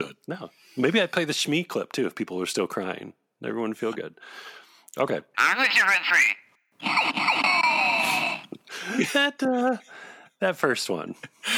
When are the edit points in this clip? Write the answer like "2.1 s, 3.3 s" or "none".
5.3 s